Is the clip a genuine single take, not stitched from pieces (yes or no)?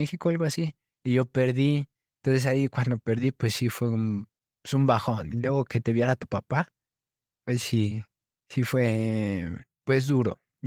yes